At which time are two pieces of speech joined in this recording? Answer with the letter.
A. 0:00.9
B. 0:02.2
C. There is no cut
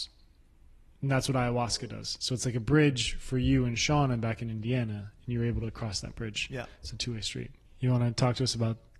C